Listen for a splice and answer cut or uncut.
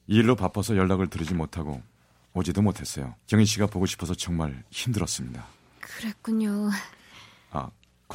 cut